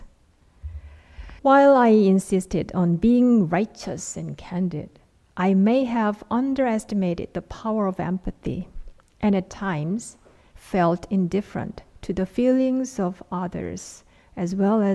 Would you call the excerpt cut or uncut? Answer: cut